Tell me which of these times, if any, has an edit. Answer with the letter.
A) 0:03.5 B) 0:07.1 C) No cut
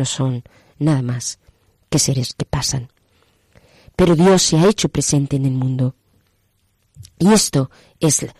C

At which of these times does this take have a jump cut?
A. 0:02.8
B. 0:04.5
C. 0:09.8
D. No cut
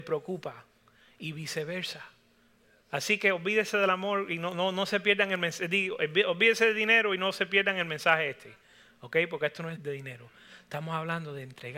C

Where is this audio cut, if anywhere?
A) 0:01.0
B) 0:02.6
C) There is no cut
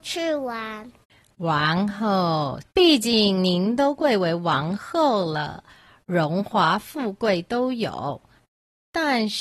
B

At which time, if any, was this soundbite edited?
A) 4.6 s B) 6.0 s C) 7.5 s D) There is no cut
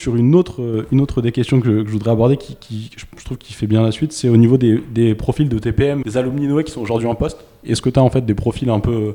B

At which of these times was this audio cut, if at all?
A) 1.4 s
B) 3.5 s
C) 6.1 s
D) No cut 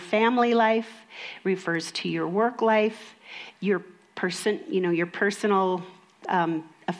B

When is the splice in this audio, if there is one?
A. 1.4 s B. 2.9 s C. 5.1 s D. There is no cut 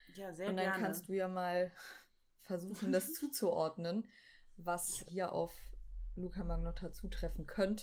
C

